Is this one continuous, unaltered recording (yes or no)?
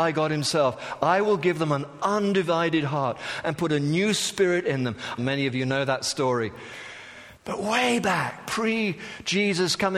no